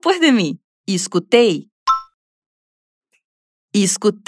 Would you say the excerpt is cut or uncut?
uncut